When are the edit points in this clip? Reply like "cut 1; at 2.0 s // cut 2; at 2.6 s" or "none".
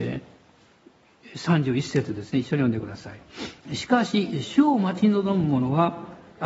cut 1; at 3.6 s